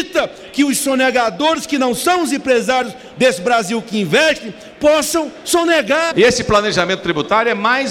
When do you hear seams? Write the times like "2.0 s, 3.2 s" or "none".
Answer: 6.1 s